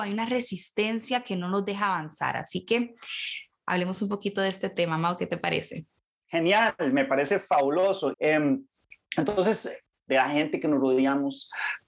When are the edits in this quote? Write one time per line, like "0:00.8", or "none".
0:08.1
0:09.9